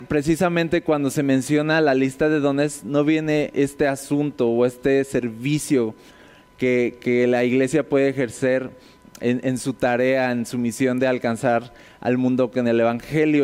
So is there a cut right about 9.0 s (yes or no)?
yes